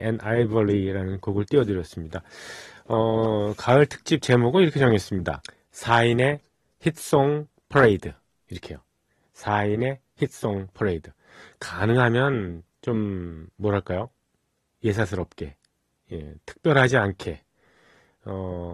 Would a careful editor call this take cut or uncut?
uncut